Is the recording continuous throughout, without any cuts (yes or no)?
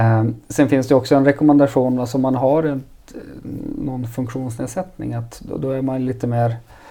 yes